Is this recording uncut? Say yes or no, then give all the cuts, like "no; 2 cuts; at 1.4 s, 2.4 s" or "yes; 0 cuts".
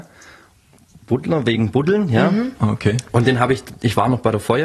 yes; 0 cuts